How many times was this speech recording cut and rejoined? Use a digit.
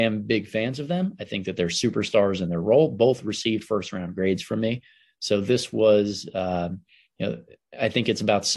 0